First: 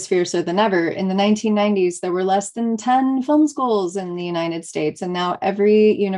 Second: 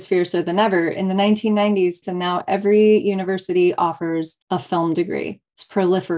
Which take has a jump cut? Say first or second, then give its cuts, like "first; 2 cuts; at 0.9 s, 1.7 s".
second; 2 cuts; at 2.0 s, 4.4 s